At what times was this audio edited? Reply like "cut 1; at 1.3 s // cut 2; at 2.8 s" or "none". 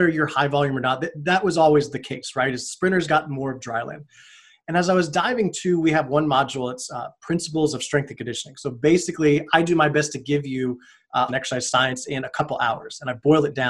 cut 1; at 11.3 s